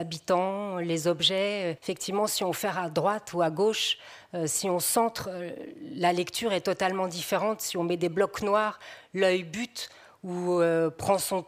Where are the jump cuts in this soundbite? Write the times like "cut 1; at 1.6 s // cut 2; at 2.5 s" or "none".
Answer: cut 1; at 1.8 s